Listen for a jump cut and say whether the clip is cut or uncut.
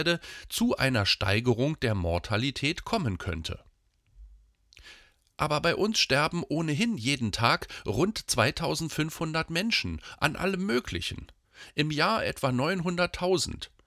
uncut